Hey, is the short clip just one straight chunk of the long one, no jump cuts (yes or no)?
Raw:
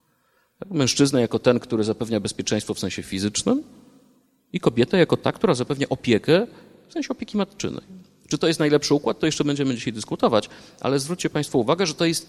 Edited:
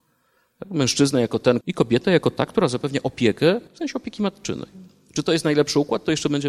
no